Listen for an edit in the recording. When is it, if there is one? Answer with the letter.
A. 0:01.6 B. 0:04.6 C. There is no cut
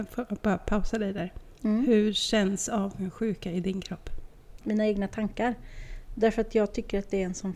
B